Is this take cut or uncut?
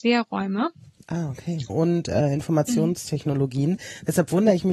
cut